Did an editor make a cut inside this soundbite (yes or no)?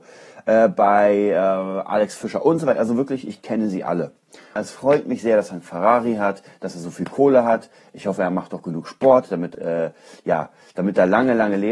yes